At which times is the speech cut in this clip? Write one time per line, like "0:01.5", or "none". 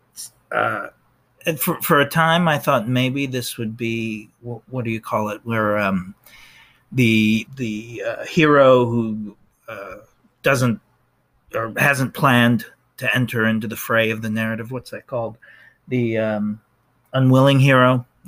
0:07.5